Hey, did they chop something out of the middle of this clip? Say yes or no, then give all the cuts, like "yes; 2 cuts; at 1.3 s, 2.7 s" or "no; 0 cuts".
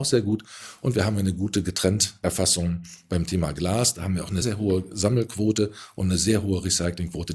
yes; 1 cut; at 4.4 s